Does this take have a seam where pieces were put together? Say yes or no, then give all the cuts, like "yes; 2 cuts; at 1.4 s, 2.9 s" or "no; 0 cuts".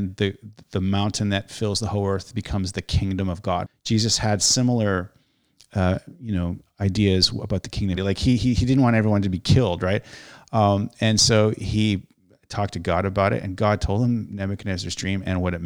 yes; 1 cut; at 7.9 s